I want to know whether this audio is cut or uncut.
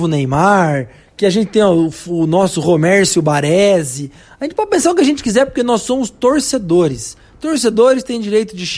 uncut